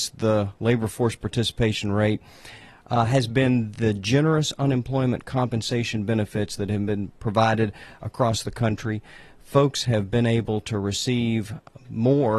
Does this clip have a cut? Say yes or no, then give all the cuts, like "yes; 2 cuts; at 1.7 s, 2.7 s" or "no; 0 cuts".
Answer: no; 0 cuts